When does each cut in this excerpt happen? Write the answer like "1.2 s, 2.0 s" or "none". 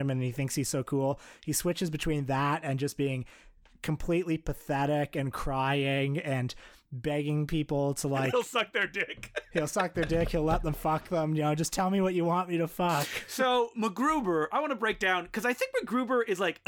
none